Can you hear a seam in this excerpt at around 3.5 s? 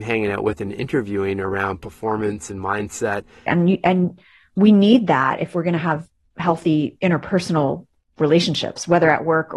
yes; 1 cut; at 3.5 s

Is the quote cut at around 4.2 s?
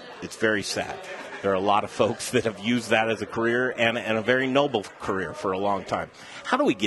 no; 0 cuts

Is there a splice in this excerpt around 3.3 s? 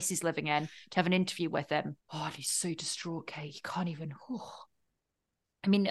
no; 1 cut; at 2.0 s

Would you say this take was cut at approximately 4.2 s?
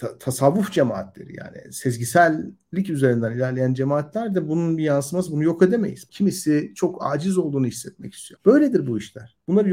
no; 2 cuts; at 6.1 s, 8.4 s

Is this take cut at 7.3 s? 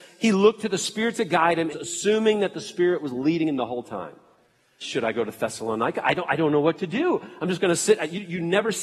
no; 2 cuts; at 1.7 s, 4.8 s

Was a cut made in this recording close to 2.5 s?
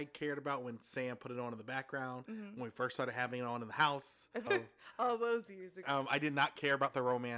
no; 2 cuts; at 4.5 s, 5.8 s

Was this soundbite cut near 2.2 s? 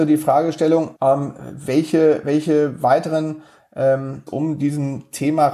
no; 2 cuts; at 1.0 s, 4.3 s

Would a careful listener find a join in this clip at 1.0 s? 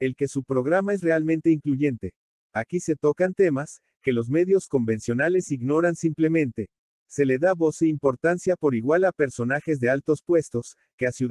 no; 0 cuts

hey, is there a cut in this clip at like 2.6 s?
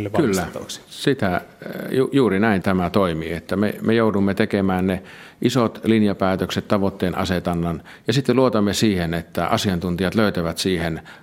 yes; 1 cut; at 2.6 s

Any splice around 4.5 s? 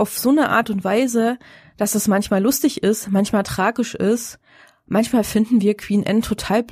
no; 0 cuts

